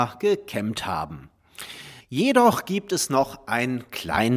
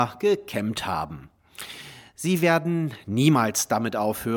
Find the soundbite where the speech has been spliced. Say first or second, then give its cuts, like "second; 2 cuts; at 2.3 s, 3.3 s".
first; 1 cut; at 2.0 s